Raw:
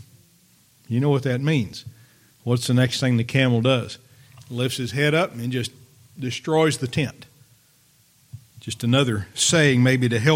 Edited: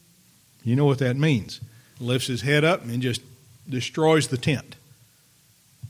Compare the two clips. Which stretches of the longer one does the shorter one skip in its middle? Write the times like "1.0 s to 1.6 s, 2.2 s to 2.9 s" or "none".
2.2 s to 4.4 s